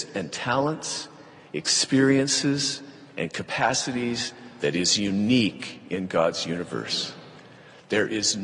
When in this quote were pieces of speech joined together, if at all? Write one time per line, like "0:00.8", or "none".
none